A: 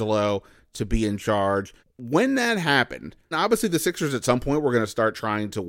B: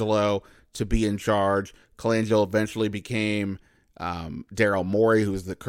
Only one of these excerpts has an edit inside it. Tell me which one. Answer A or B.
A